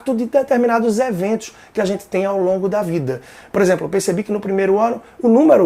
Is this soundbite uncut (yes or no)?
yes